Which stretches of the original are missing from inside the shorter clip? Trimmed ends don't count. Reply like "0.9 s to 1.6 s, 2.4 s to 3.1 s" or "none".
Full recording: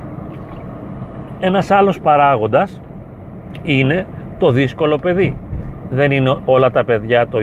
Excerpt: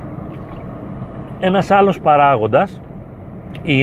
none